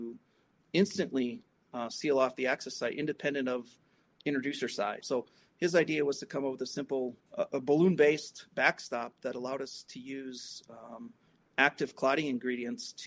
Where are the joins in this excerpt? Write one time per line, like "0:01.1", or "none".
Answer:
0:05.0
0:07.2